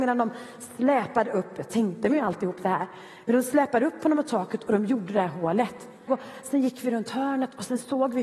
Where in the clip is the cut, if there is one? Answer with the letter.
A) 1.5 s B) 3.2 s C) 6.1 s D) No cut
C